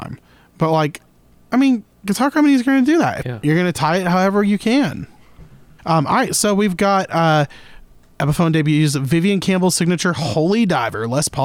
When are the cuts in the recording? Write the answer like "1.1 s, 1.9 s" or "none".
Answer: 3.2 s, 5.8 s

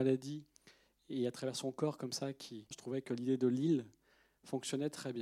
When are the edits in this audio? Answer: 2.7 s

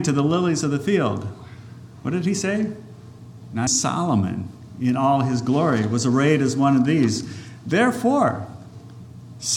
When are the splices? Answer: 3.7 s

